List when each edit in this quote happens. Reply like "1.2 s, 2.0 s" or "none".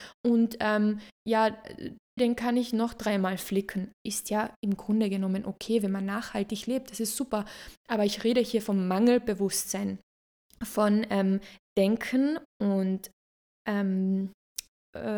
2.2 s, 12.5 s